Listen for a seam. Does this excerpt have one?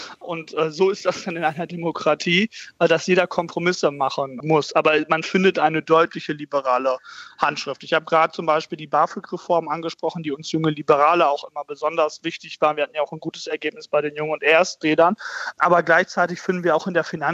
no; 0 cuts

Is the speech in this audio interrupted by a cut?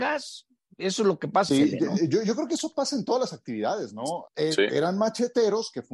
yes; 2 cuts; at 1.5 s, 4.3 s

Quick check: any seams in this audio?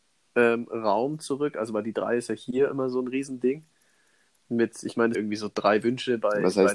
yes; 1 cut; at 5.1 s

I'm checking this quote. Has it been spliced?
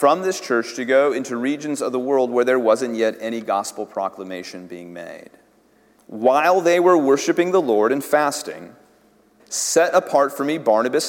yes; 2 cuts; at 6.0 s, 9.4 s

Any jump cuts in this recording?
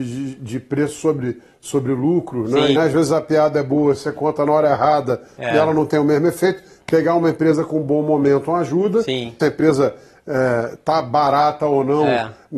yes; 2 cuts; at 2.7 s, 9.4 s

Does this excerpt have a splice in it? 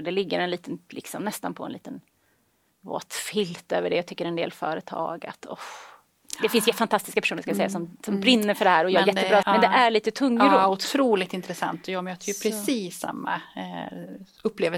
yes; 1 cut; at 9.4 s

